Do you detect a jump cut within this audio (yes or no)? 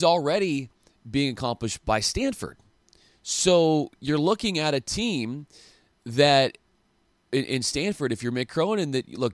no